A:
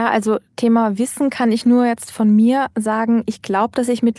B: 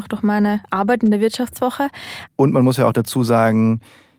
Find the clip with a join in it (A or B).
B